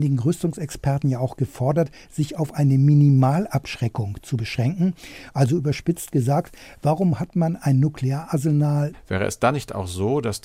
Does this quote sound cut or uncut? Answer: cut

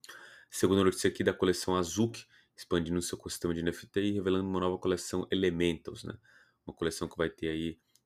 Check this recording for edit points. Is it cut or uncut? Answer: uncut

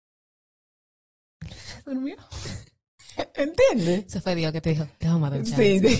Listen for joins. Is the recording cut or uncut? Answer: uncut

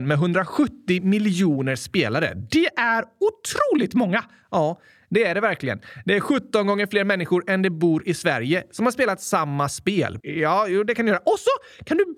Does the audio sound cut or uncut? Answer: cut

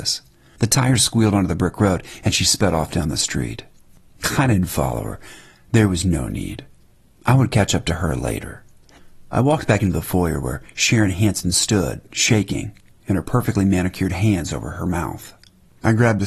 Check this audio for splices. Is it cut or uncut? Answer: uncut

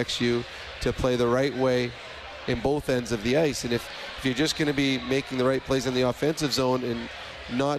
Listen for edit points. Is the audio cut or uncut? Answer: uncut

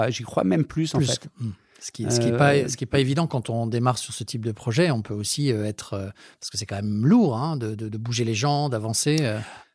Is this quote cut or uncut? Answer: uncut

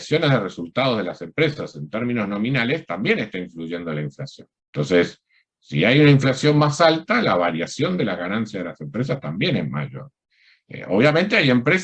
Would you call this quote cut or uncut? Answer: uncut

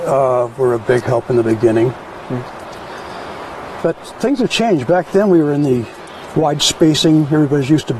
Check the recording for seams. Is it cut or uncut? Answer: uncut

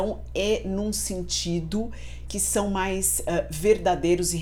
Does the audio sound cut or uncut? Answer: cut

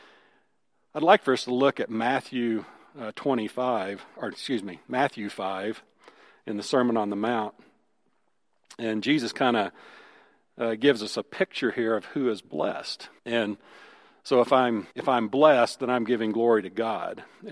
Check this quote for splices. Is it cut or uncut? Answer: cut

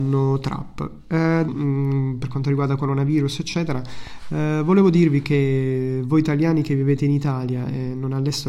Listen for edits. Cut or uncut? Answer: cut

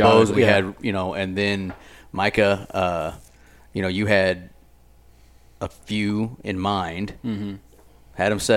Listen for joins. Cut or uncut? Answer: uncut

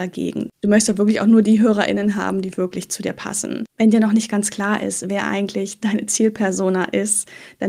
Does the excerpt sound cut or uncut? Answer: uncut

